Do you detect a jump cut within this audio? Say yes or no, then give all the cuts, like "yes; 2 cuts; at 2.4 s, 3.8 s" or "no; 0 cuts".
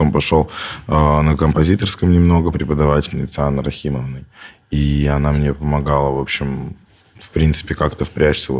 yes; 1 cut; at 2.5 s